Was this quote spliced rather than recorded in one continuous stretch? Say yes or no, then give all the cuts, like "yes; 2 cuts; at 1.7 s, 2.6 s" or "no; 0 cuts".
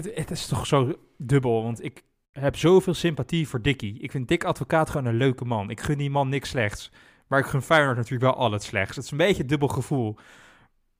no; 0 cuts